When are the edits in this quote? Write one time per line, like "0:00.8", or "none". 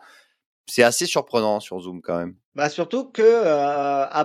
0:02.4